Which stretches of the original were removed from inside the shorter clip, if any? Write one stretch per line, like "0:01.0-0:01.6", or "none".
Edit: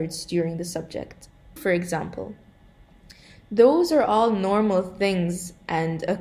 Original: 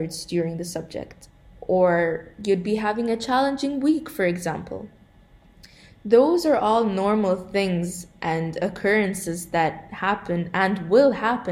0:01.6-0:04.1